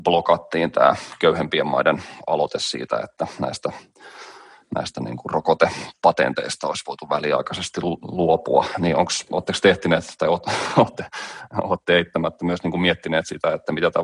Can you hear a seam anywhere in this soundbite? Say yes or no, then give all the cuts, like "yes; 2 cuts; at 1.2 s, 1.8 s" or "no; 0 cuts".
no; 0 cuts